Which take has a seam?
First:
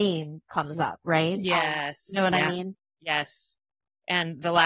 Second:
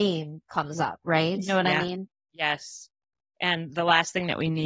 second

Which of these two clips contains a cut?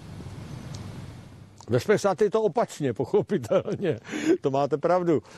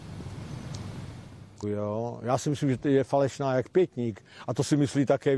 second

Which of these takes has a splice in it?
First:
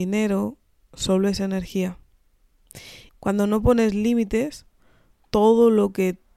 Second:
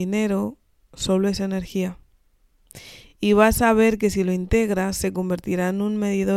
first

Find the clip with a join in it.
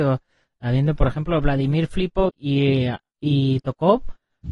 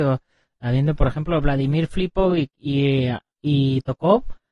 first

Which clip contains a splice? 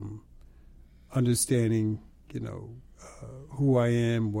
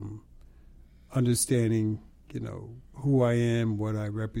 second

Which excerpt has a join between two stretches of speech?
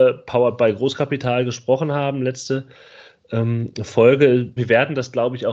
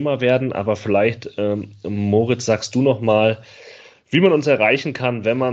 first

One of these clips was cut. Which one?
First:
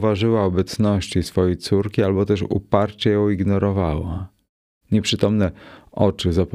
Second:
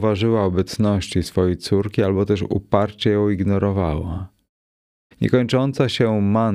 first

